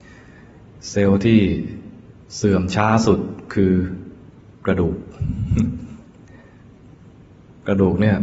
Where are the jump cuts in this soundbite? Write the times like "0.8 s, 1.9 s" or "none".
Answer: none